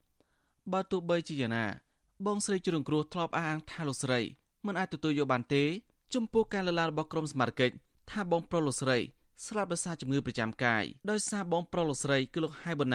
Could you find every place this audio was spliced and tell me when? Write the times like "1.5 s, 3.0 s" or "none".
11.0 s